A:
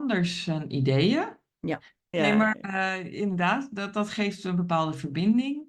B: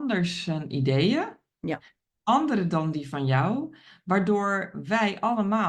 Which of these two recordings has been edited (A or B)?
A